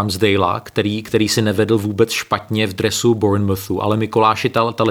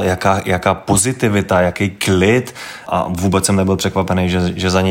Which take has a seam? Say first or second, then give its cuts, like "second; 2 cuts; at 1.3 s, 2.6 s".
second; 1 cut; at 2.9 s